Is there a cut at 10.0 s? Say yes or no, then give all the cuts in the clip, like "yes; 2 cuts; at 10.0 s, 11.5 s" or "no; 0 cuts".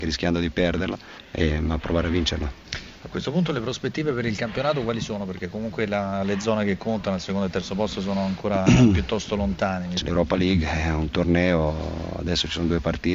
yes; 1 cut; at 10.0 s